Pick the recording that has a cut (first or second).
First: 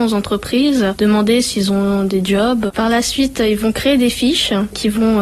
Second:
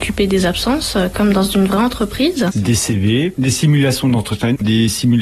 second